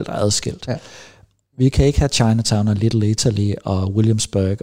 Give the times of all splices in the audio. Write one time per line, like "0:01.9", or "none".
0:01.4